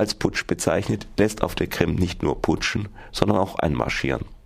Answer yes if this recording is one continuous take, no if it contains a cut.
yes